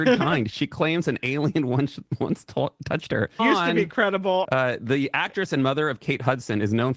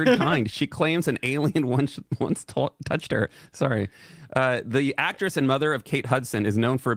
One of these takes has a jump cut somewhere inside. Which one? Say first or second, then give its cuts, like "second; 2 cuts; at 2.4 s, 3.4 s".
first; 2 cuts; at 3.4 s, 4.4 s